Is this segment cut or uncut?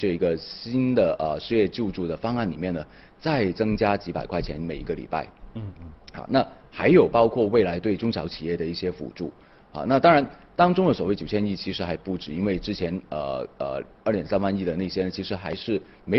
uncut